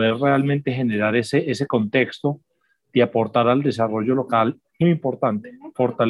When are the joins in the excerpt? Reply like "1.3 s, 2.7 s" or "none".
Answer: 4.8 s